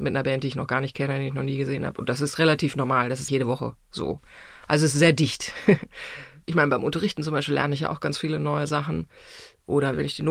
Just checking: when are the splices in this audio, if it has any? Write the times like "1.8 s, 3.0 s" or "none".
3.3 s